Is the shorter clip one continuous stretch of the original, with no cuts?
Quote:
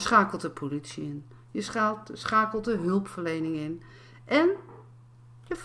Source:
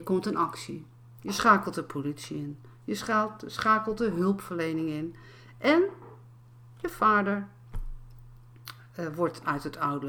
yes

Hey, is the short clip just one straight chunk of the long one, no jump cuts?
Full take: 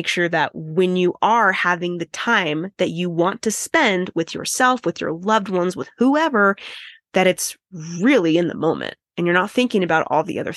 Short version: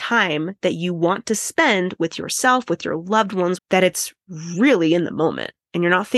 no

